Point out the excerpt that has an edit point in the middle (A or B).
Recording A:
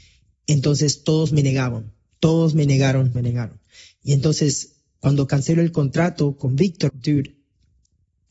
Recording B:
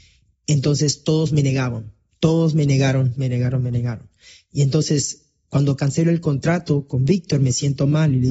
A